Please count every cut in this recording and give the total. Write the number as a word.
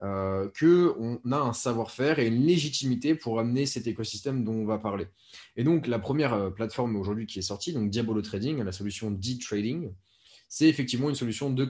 zero